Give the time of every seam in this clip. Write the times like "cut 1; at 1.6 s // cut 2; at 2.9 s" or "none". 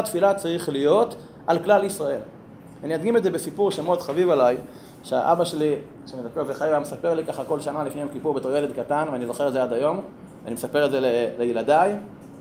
none